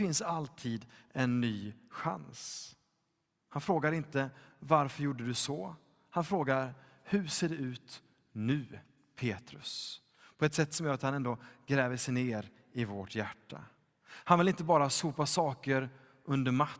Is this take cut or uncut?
uncut